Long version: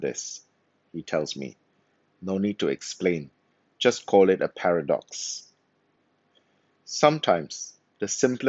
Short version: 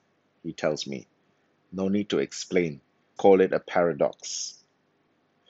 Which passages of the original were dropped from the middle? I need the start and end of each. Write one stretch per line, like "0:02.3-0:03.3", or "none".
0:03.7-0:04.1